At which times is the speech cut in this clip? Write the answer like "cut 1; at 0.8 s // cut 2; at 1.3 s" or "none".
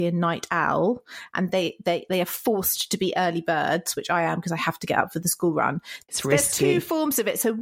cut 1; at 1.5 s // cut 2; at 6.1 s